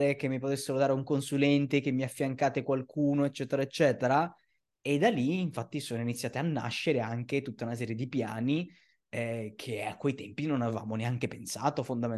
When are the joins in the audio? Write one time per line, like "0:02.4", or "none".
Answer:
none

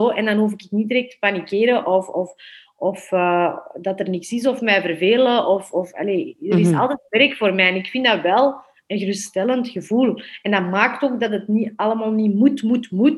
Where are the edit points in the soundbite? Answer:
none

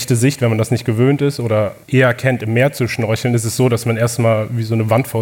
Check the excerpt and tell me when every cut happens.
0:01.8

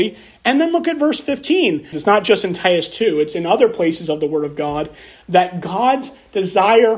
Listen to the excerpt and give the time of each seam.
0:01.9

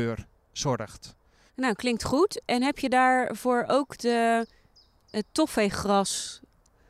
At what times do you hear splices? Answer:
0:01.5

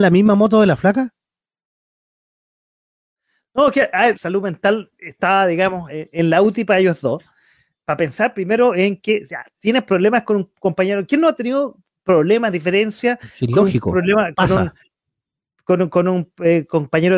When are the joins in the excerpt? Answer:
0:04.1
0:05.9

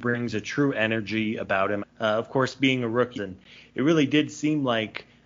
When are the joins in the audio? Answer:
0:01.8
0:03.1

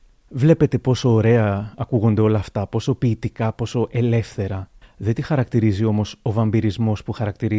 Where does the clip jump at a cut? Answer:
0:03.5
0:04.8

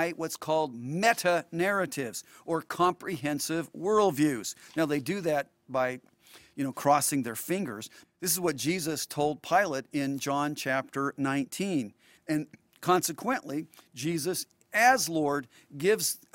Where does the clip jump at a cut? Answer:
0:08.0
0:12.2

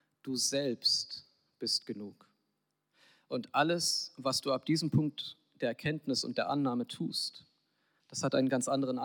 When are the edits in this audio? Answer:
none

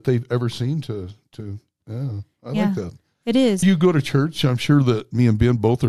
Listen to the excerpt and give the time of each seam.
0:03.6

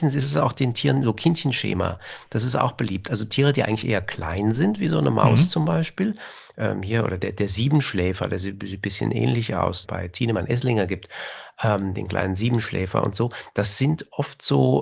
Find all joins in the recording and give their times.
0:09.8

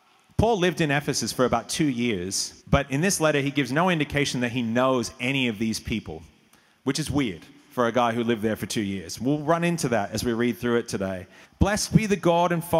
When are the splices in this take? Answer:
0:02.6
0:11.4

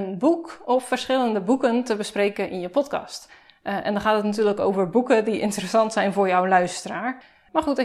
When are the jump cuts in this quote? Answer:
none

